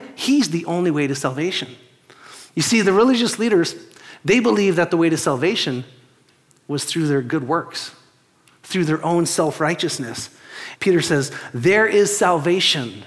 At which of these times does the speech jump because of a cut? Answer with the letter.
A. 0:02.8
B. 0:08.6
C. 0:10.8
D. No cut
C